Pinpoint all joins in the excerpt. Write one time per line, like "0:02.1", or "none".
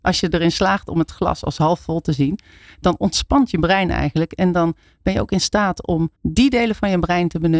0:06.1